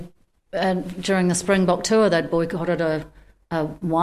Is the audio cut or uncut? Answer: uncut